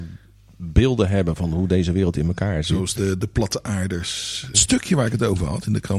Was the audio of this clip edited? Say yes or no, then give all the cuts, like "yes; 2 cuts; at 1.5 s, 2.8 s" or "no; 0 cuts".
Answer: yes; 2 cuts; at 3.0 s, 4.5 s